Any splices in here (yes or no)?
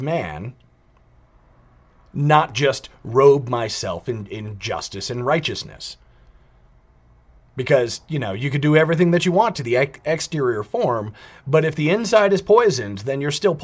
no